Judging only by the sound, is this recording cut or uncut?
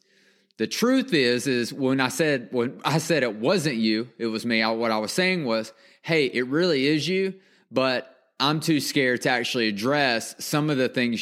uncut